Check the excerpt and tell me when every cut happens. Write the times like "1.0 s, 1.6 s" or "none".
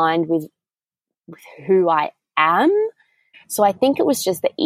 3.3 s